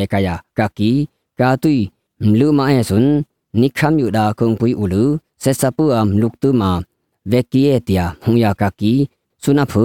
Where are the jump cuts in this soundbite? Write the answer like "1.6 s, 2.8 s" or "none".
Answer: 8.6 s